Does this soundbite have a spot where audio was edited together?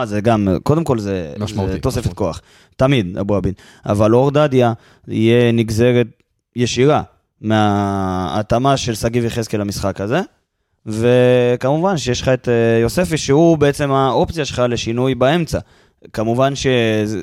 no; 0 cuts

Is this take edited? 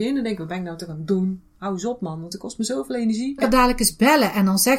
yes; 1 cut; at 3.4 s

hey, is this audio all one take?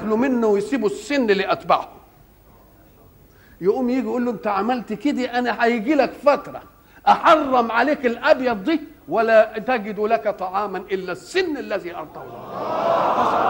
yes; 0 cuts

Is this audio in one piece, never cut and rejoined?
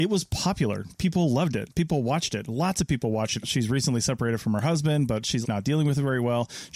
no; 2 cuts; at 3.4 s, 5.4 s

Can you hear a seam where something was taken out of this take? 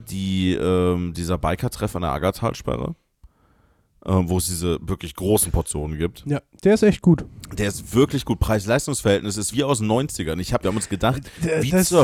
yes; 2 cuts; at 9.5 s, 10.6 s

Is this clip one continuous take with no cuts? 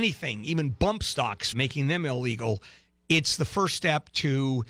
no; 1 cut; at 1.5 s

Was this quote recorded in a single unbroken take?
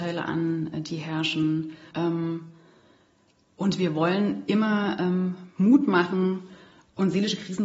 no; 1 cut; at 1.9 s

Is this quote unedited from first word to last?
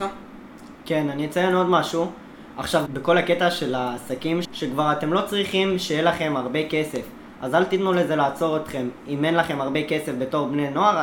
no; 2 cuts; at 2.9 s, 4.4 s

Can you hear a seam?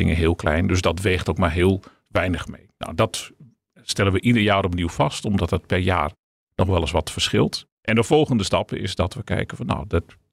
yes; 1 cut; at 7.7 s

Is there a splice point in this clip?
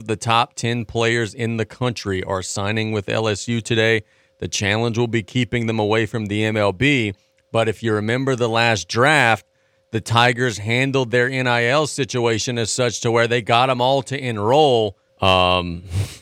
yes; 1 cut; at 15.1 s

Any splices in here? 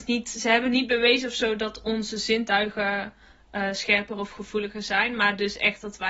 no; 0 cuts

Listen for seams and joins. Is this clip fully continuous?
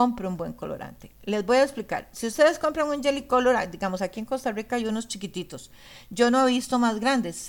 yes; 0 cuts

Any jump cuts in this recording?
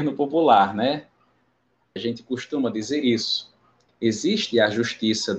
yes; 2 cuts; at 2.0 s, 3.9 s

